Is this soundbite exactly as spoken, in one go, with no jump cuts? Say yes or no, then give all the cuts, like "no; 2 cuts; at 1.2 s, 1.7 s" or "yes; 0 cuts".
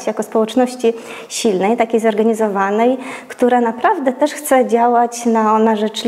yes; 0 cuts